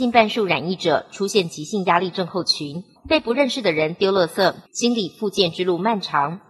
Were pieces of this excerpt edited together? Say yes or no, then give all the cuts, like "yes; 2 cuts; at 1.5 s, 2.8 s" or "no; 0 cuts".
yes; 2 cuts; at 3.0 s, 4.7 s